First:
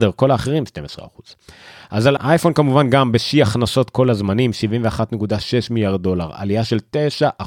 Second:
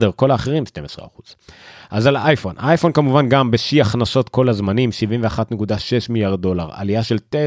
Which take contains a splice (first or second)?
first